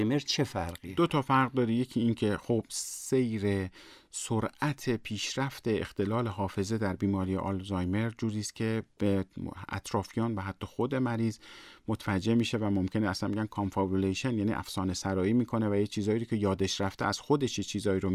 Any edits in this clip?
no; 0 cuts

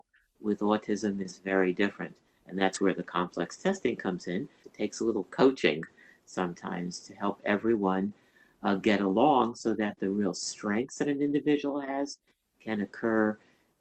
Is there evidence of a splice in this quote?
no; 0 cuts

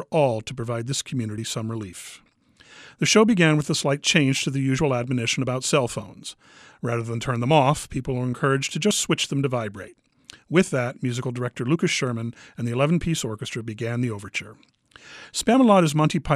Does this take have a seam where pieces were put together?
no; 0 cuts

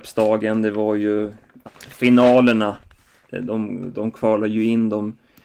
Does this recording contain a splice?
yes; 1 cut; at 1.7 s

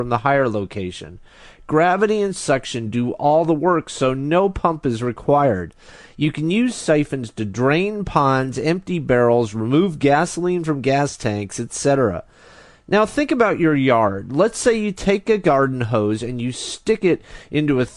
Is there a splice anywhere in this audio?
no; 0 cuts

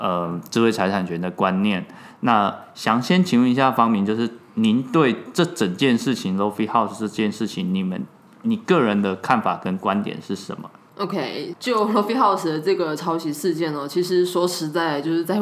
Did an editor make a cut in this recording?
no; 0 cuts

